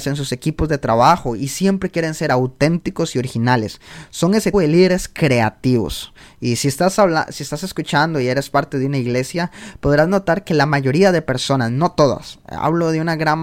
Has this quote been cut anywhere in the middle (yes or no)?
yes